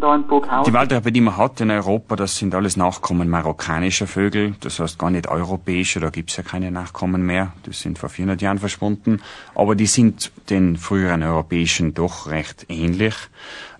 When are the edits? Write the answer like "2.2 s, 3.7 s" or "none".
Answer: none

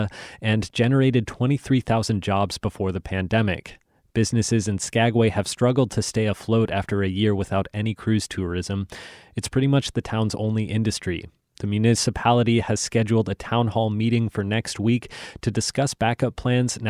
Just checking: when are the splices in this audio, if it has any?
none

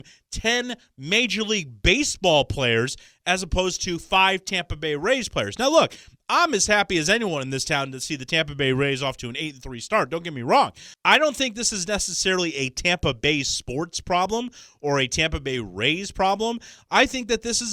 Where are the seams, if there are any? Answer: 10.9 s

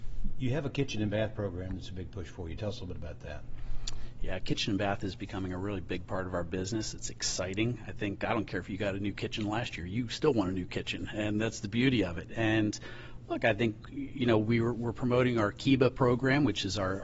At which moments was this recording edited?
none

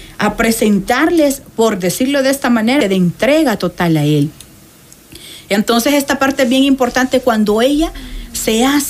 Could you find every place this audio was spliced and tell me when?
2.8 s

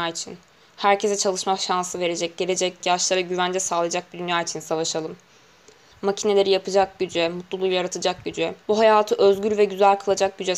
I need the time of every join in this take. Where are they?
2.8 s, 5.9 s, 8.6 s

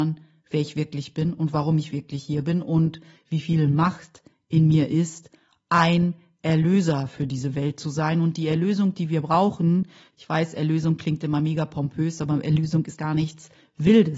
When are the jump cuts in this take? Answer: 13.0 s

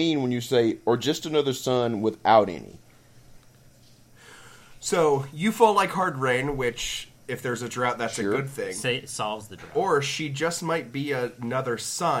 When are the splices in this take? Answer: none

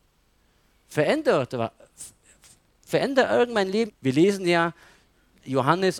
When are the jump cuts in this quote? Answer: 3.9 s

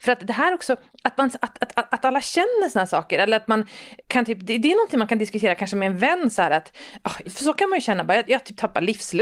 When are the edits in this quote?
4.0 s, 7.2 s

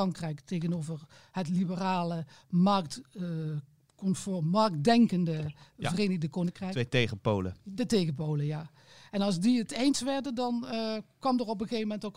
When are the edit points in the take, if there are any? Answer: none

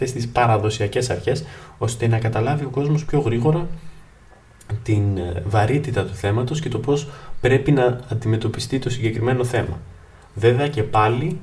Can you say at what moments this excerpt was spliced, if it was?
none

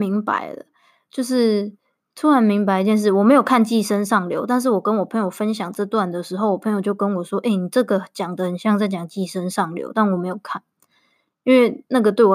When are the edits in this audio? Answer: none

